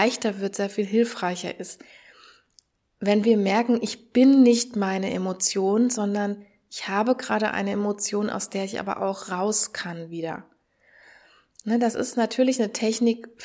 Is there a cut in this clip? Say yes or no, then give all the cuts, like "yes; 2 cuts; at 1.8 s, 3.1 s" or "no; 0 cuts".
no; 0 cuts